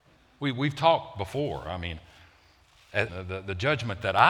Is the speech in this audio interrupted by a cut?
yes; 1 cut; at 3.1 s

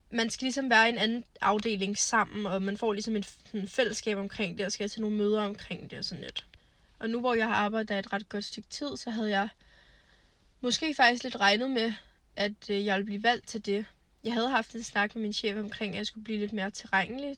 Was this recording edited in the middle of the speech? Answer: no; 0 cuts

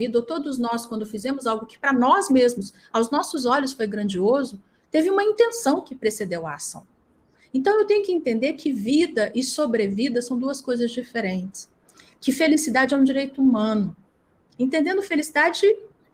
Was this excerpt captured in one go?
yes; 0 cuts

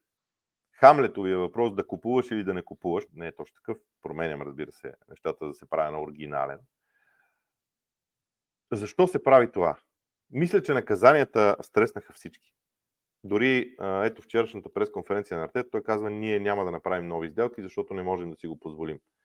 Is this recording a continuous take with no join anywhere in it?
no; 1 cut; at 3.1 s

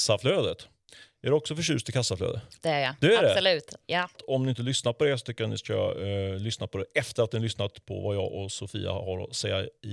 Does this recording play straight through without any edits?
no; 2 cuts; at 2.6 s, 4.2 s

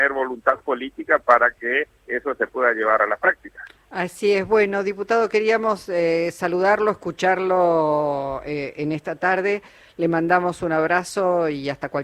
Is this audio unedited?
yes; 0 cuts

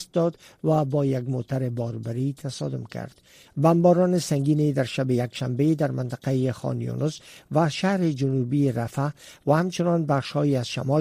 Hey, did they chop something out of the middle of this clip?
yes; 1 cut; at 3.5 s

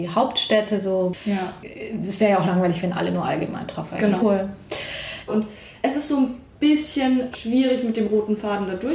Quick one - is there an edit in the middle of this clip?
yes; 3 cuts; at 4.2 s, 5.3 s, 7.3 s

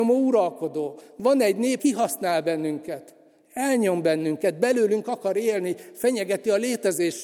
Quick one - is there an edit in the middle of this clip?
yes; 1 cut; at 1.8 s

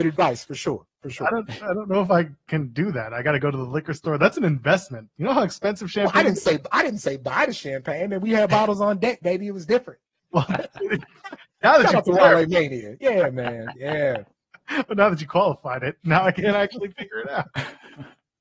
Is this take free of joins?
yes; 0 cuts

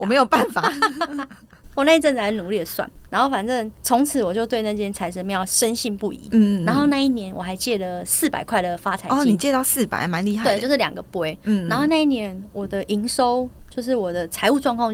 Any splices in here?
no; 0 cuts

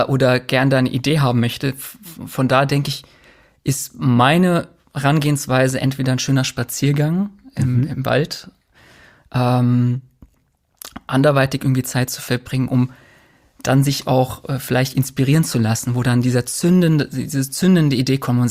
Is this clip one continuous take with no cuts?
yes; 0 cuts

